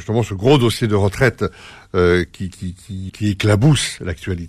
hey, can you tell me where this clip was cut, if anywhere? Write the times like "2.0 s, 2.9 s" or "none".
3.1 s